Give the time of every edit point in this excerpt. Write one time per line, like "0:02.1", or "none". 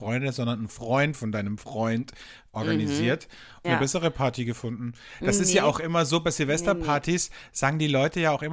0:03.6